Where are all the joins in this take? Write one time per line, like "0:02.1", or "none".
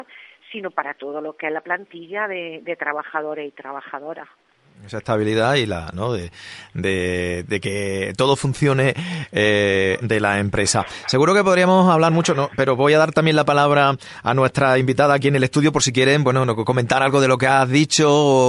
0:05.9
0:10.0